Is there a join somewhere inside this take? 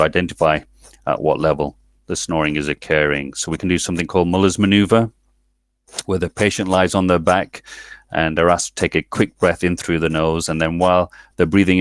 no; 0 cuts

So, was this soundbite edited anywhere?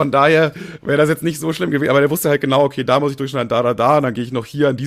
no; 0 cuts

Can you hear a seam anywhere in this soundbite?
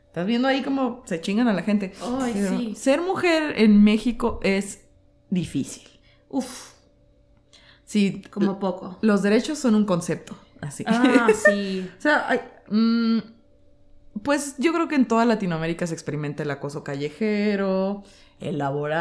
no; 0 cuts

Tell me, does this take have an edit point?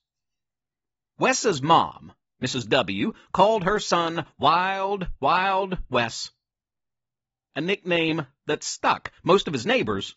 no; 0 cuts

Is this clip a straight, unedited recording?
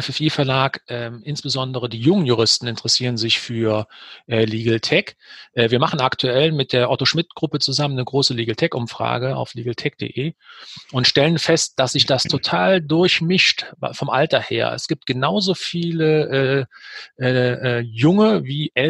yes; 0 cuts

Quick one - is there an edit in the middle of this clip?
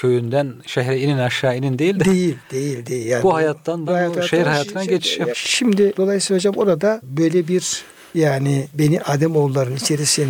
yes; 3 cuts; at 3.9 s, 5.3 s, 9.0 s

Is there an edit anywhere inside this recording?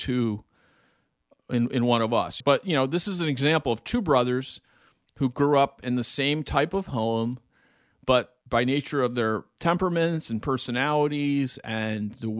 yes; 2 cuts; at 2.4 s, 8.4 s

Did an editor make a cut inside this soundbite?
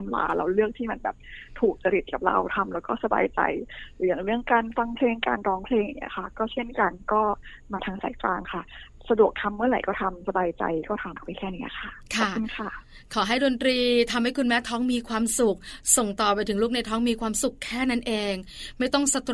yes; 1 cut; at 11.2 s

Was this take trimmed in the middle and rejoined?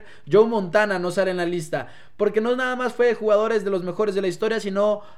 no; 0 cuts

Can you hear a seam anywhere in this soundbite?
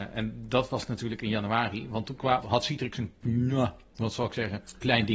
yes; 1 cut; at 2.4 s

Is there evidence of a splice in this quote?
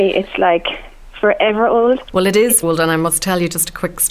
yes; 1 cut; at 2.6 s

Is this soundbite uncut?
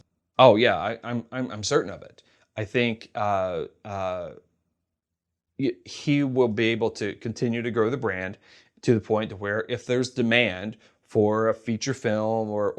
yes; 0 cuts

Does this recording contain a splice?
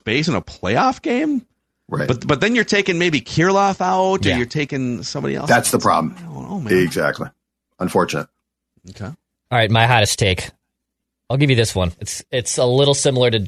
no; 0 cuts

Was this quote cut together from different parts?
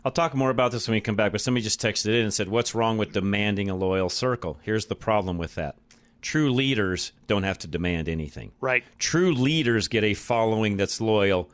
no; 0 cuts

